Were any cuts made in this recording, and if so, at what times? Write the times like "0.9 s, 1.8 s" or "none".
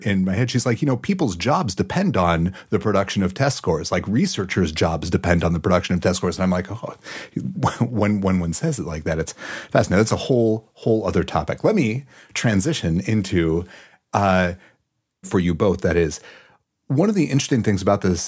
15.2 s